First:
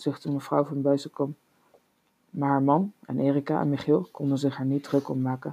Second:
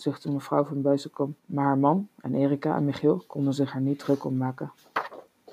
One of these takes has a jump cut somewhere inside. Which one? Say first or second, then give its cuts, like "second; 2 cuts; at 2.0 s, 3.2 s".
second; 1 cut; at 1.4 s